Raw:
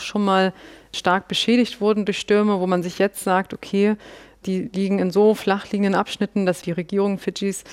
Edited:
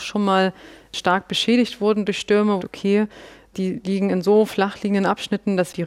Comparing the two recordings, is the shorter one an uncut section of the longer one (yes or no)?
no